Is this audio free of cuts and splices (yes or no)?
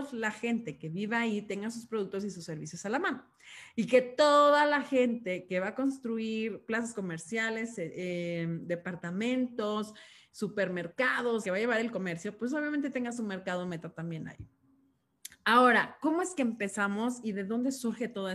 no